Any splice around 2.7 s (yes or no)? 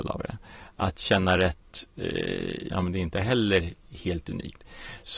yes